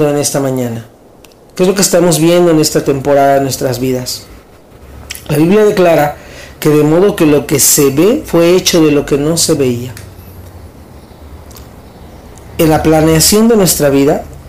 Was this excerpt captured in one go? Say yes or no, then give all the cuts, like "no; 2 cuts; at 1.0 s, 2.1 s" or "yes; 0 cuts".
yes; 0 cuts